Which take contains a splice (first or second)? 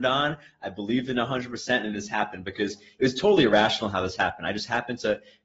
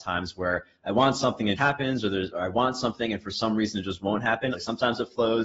second